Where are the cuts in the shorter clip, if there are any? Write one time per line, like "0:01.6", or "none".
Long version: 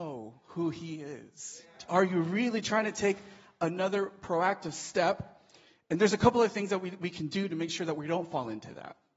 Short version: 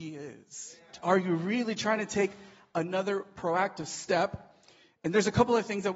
none